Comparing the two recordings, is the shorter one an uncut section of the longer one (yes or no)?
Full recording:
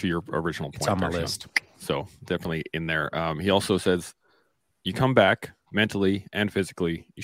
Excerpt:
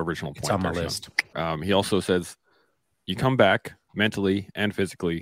no